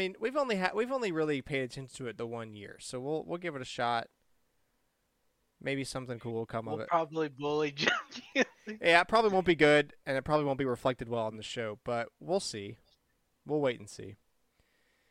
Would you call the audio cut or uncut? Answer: uncut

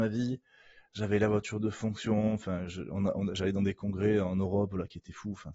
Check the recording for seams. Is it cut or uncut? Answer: uncut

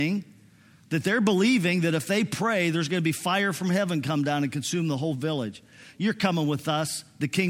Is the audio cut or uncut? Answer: cut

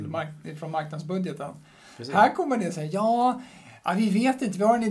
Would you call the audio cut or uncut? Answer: uncut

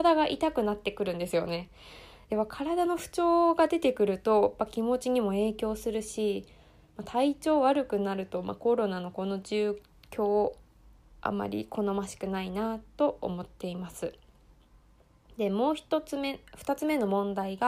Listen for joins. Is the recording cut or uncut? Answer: uncut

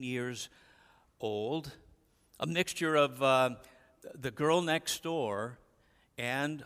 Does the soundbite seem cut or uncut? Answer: uncut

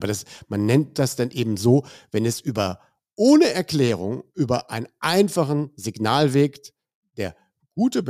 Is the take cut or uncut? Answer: uncut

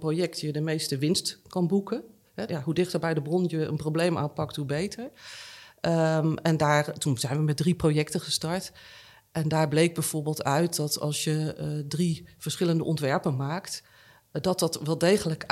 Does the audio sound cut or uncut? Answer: cut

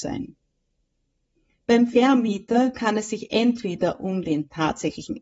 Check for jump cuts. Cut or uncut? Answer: uncut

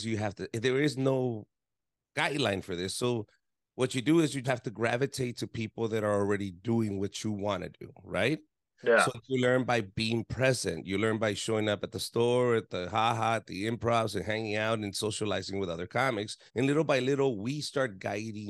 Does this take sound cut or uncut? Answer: cut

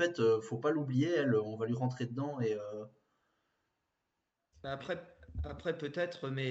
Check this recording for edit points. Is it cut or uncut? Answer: uncut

